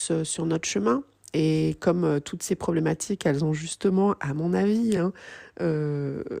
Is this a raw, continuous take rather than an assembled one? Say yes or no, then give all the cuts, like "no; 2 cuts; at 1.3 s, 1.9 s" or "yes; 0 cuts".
yes; 0 cuts